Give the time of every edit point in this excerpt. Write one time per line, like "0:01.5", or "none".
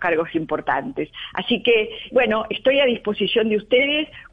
0:02.1